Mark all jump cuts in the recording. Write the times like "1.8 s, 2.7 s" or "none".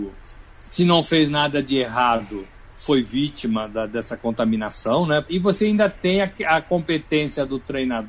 5.3 s